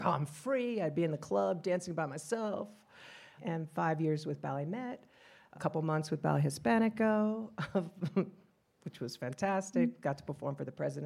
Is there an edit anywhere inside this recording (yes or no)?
yes